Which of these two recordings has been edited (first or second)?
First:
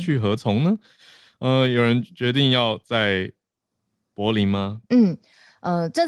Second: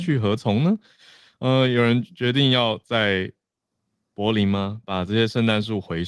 first